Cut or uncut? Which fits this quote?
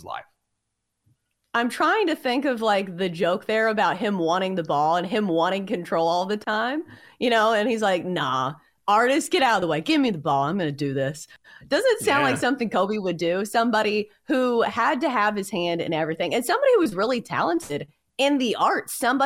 uncut